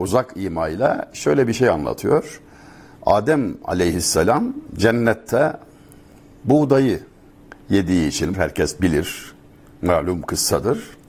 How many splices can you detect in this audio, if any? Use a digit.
1